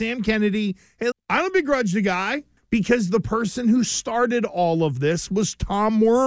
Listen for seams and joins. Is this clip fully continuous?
no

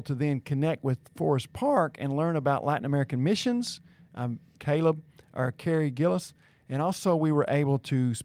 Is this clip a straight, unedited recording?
no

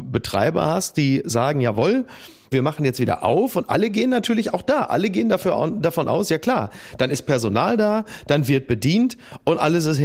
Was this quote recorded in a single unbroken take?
yes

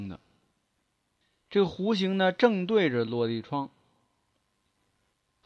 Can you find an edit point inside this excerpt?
no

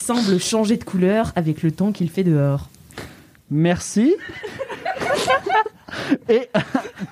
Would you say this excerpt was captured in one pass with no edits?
yes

